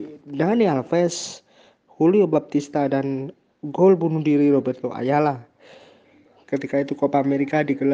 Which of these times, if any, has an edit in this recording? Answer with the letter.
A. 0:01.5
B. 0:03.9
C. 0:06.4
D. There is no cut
C